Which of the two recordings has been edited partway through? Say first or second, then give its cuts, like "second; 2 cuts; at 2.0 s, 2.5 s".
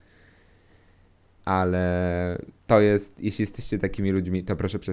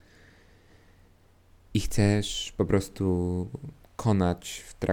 first; 2 cuts; at 1.4 s, 2.6 s